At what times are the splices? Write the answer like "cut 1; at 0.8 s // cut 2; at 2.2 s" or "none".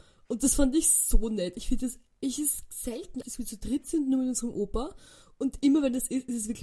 cut 1; at 3.2 s